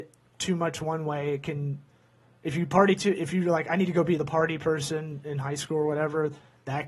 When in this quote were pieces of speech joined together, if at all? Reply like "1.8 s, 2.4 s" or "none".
none